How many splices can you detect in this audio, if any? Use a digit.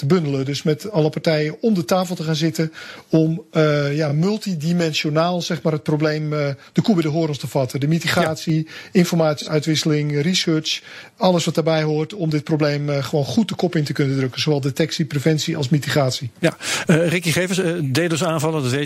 0